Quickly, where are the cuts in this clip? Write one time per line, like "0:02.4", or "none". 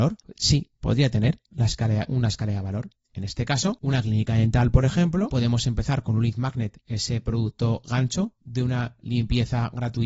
none